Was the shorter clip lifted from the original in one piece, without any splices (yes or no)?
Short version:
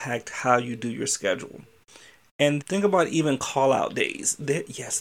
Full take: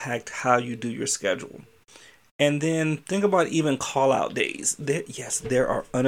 no